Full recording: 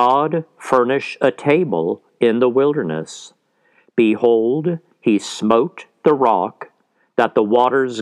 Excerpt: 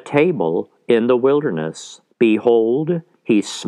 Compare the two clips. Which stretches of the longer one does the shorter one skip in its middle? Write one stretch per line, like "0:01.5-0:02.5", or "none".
0:03.4-0:03.9

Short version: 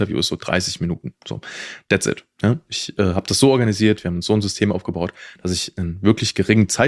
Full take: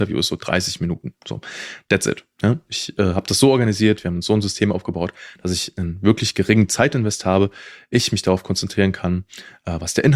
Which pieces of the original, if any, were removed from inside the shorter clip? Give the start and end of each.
none

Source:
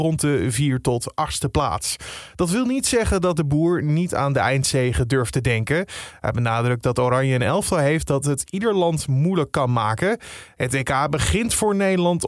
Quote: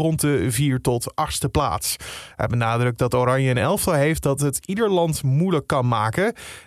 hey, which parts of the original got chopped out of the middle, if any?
0:02.3-0:06.2

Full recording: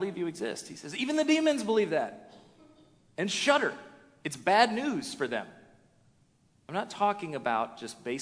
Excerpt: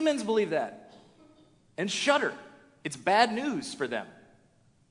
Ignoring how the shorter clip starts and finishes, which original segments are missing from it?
none

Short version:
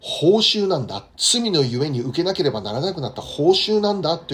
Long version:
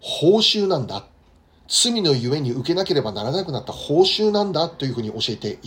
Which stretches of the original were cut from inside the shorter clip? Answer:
0:01.1-0:01.6

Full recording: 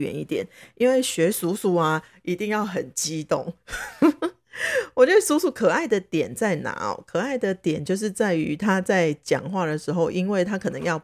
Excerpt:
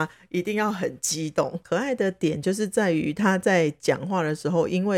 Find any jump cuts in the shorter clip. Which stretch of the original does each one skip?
0:03.6-0:07.1

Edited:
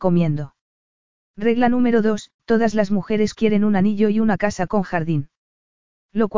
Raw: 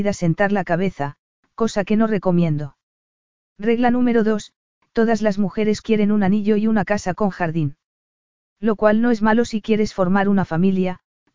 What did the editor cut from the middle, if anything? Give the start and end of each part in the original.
0:04.6-0:04.9

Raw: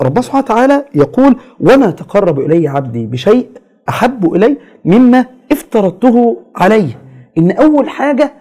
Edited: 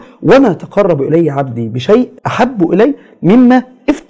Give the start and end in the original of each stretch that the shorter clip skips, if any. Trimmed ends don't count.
0:03.6-0:03.8

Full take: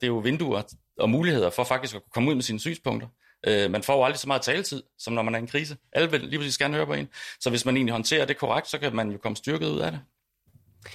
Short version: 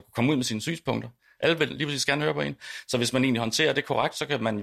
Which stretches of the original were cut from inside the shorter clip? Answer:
0:03.3-0:05.9

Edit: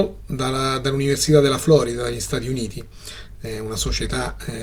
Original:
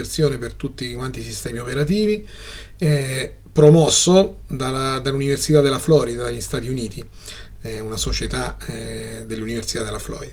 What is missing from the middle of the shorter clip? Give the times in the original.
none

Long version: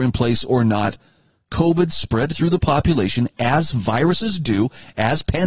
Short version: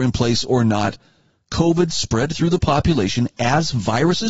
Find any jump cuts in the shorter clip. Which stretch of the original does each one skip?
none

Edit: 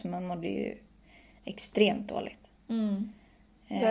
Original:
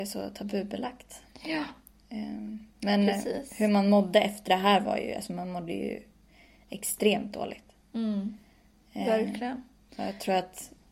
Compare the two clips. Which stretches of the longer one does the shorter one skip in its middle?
none

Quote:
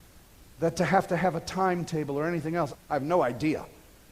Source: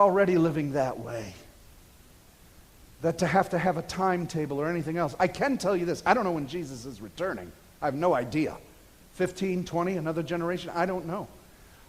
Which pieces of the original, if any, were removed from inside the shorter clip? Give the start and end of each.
0:05.2-0:07.7

